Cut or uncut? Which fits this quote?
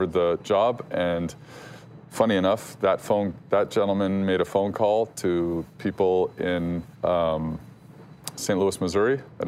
cut